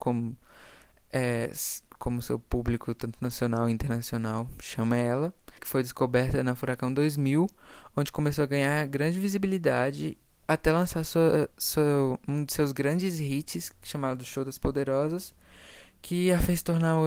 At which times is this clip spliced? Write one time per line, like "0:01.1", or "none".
0:05.6